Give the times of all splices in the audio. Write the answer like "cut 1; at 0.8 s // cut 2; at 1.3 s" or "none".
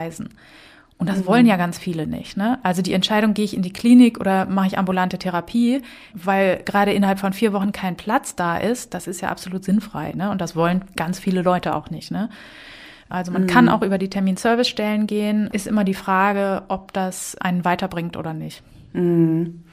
cut 1; at 6.1 s